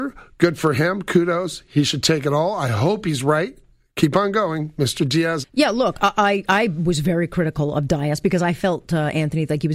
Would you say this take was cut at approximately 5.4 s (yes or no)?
yes